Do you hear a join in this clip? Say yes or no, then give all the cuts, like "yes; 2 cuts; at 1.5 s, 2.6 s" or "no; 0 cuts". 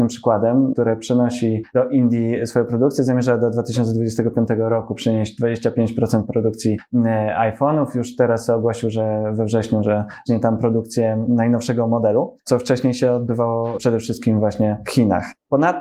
no; 0 cuts